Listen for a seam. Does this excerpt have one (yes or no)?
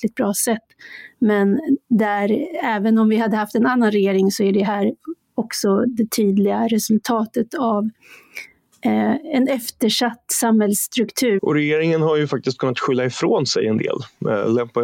yes